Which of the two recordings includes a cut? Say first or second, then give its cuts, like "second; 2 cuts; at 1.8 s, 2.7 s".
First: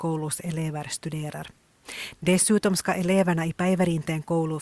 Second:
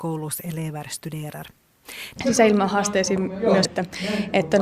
second; 2 cuts; at 2.2 s, 3.6 s